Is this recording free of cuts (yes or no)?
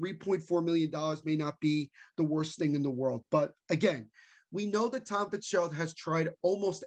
yes